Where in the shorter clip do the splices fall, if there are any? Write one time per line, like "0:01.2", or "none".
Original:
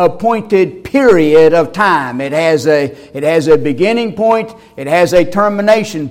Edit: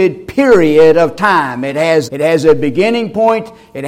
0:02.1